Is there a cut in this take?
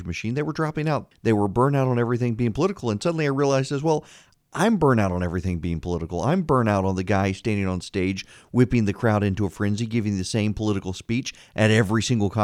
yes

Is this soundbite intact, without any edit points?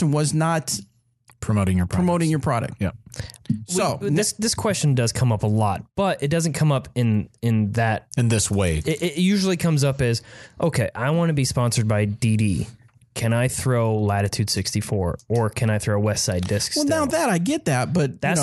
yes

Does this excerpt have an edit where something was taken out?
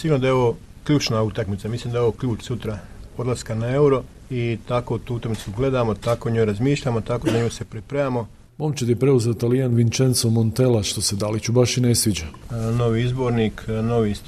yes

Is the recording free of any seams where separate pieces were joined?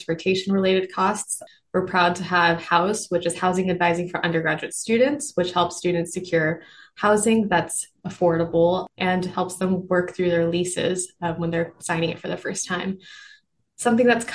yes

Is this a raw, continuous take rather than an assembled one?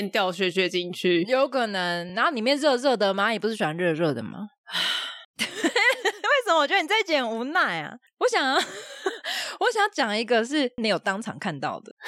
yes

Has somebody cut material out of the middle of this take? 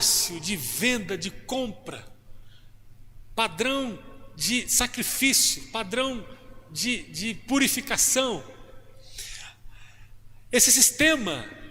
no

